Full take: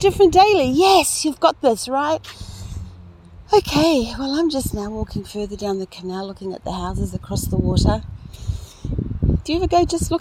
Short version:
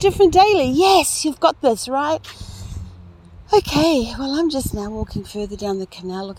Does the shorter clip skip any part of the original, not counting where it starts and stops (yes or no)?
no